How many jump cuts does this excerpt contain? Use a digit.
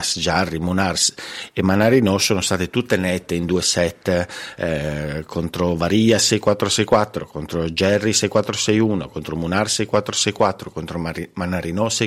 0